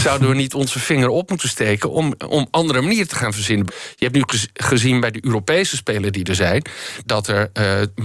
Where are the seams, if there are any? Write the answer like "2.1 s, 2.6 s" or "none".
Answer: 3.7 s, 7.1 s